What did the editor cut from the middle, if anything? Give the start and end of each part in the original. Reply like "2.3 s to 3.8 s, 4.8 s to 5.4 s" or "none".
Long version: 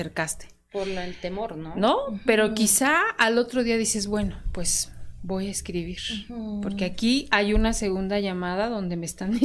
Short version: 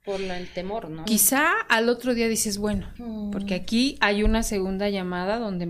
1.7 s to 2.5 s, 4.4 s to 6.3 s